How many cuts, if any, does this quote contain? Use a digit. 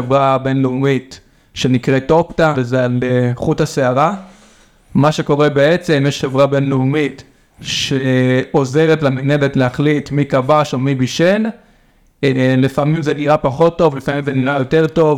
1